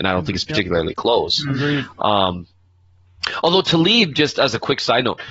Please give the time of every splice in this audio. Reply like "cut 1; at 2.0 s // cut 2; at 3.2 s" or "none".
none